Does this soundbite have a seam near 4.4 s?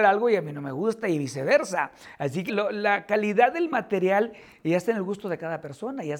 no; 1 cut; at 2.5 s

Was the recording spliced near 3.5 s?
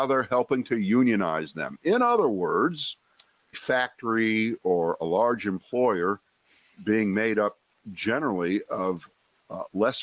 yes; 1 cut; at 3.5 s

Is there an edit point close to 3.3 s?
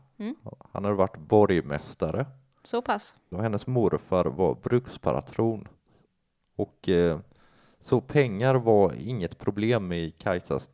yes; 1 cut; at 3.3 s

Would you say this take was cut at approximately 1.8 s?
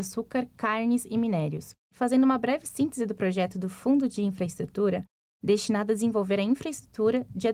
yes; 2 cuts; at 1.8 s, 5.3 s

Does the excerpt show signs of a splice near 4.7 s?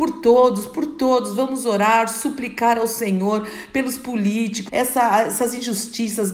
yes; 1 cut; at 4.7 s

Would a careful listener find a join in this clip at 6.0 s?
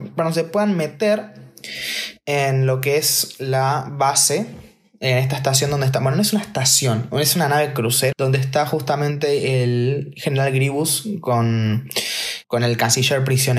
no; 2 cuts; at 8.1 s, 12.4 s

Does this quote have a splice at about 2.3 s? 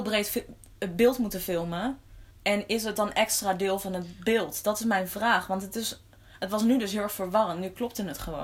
yes; 1 cut; at 2.3 s

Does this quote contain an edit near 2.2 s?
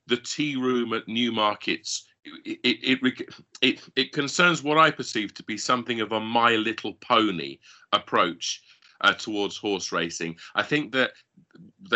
yes; 1 cut; at 2.2 s

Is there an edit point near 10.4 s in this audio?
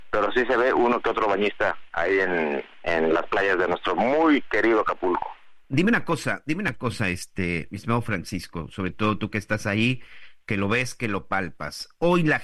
no; 1 cut; at 5.6 s

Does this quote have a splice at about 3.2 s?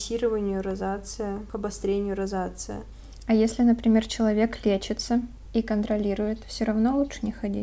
no; 0 cuts

